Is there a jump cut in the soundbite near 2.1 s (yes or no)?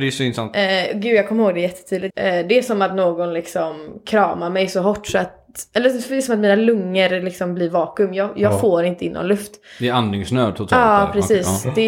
yes